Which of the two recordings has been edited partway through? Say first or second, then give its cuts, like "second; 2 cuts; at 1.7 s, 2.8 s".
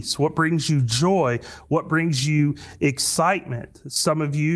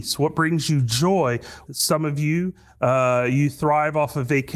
second; 1 cut; at 1.7 s